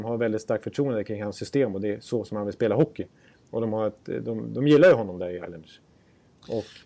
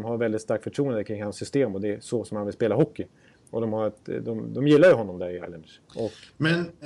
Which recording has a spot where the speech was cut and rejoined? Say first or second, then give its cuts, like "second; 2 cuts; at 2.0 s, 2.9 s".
second; 1 cut; at 5.9 s